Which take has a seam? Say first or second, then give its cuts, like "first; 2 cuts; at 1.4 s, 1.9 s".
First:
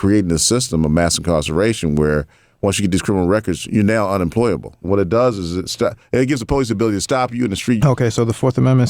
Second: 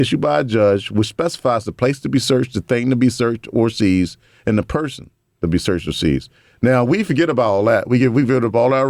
first; 2 cuts; at 4.8 s, 7.8 s